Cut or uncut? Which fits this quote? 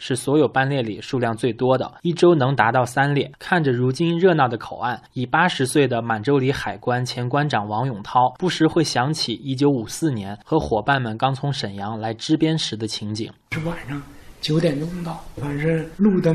cut